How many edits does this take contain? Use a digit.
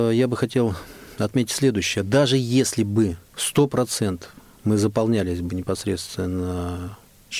1